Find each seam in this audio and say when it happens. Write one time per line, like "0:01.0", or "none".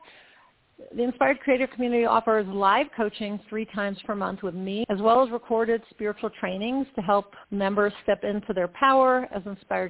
0:04.8
0:07.4